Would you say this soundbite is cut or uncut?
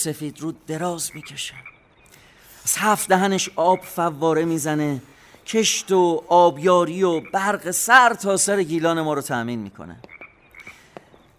uncut